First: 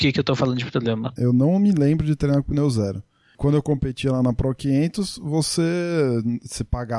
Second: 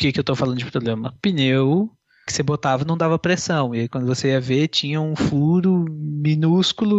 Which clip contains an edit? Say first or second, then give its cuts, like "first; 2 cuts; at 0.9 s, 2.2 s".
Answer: first; 1 cut; at 1.2 s